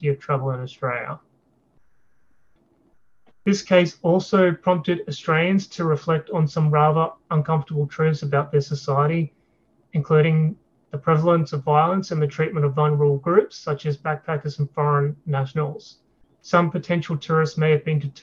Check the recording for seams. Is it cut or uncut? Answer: cut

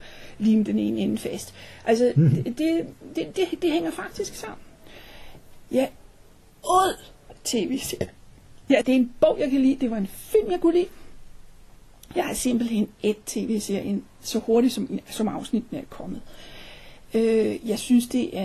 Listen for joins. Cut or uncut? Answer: cut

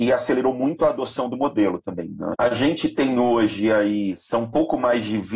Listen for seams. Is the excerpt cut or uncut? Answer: cut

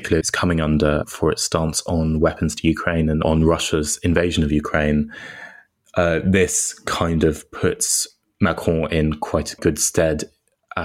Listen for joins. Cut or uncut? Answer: uncut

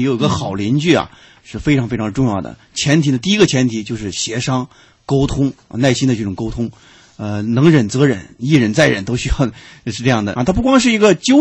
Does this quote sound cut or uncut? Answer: cut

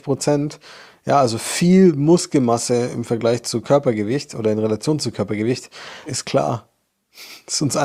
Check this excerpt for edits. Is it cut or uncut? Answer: cut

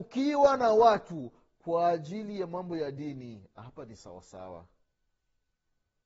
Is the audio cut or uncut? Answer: uncut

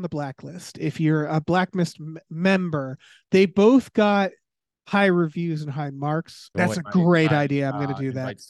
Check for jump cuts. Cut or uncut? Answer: cut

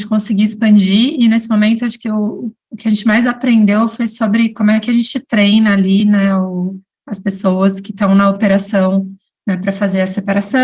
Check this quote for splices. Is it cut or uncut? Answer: uncut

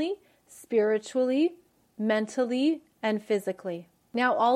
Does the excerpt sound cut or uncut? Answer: uncut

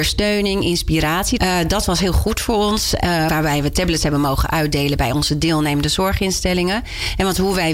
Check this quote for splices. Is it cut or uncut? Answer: cut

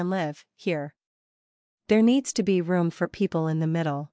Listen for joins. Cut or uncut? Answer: uncut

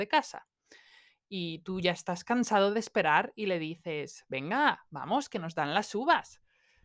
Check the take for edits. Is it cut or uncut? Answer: uncut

